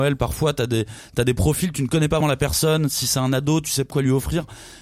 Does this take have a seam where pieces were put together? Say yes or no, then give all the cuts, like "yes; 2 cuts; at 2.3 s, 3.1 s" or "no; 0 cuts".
yes; 2 cuts; at 2.2 s, 3.9 s